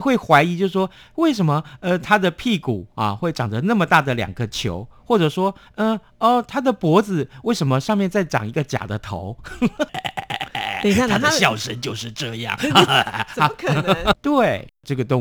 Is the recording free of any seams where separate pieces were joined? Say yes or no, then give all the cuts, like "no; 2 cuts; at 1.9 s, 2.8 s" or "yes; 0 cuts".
no; 2 cuts; at 9.9 s, 14.1 s